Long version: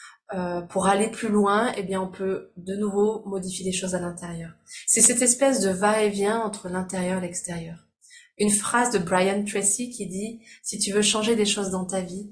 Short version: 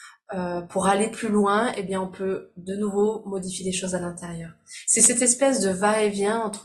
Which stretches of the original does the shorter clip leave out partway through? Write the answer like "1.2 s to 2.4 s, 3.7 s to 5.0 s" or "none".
none